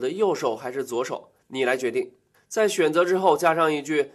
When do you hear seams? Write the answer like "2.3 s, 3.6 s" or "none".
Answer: 2.3 s